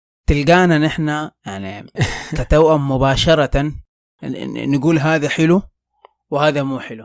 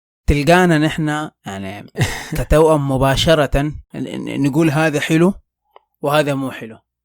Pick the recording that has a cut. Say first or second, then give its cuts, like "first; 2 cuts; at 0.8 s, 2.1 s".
second; 1 cut; at 3.8 s